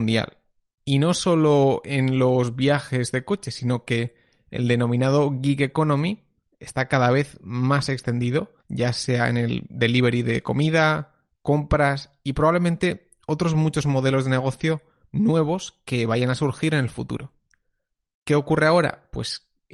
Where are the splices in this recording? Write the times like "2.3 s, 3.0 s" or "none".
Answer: 8.6 s, 18.1 s